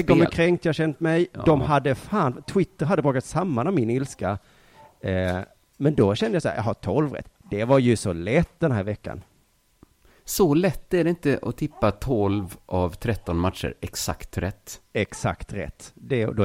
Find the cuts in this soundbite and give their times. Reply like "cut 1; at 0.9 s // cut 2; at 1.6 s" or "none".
none